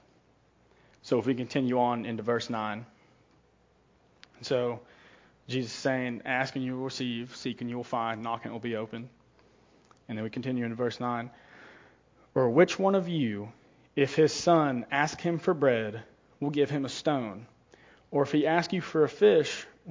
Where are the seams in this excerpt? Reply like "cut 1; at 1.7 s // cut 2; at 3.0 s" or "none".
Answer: none

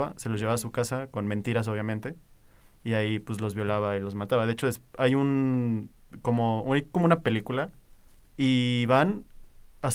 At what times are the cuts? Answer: none

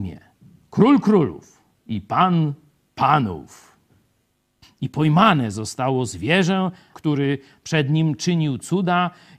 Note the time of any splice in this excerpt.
cut 1; at 4.6 s // cut 2; at 6.9 s

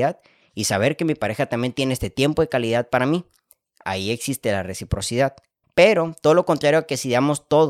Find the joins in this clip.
cut 1; at 5.6 s

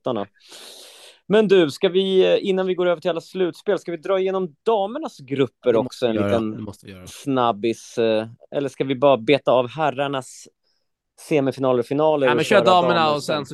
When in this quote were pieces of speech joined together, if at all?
none

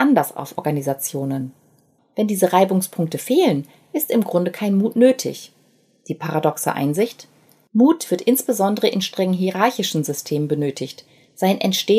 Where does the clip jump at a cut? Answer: cut 1; at 2.0 s

